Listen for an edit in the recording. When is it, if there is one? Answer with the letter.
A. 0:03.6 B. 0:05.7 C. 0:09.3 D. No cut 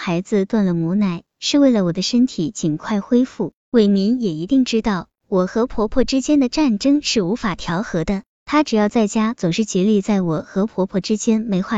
A